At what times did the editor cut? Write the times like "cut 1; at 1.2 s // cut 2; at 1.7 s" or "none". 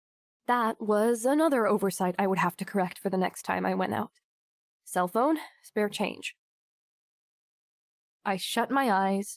cut 1; at 8.1 s